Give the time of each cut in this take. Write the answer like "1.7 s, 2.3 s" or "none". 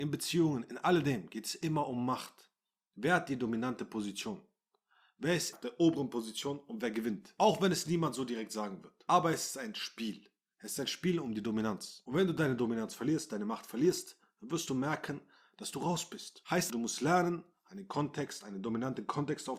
5.5 s, 16.7 s